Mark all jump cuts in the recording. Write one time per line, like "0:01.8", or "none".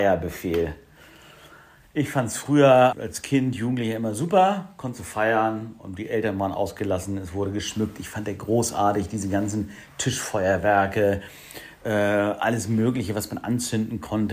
0:02.9